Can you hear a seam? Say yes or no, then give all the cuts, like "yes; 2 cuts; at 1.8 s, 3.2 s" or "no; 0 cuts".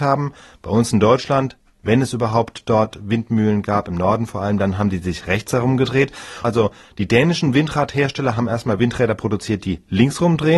yes; 1 cut; at 6.4 s